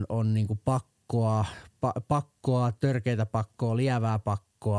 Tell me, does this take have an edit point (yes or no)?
no